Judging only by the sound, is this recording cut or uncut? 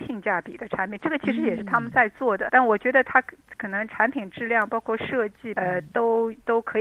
cut